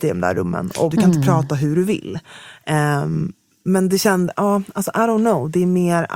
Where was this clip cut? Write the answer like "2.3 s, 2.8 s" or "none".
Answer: 0.9 s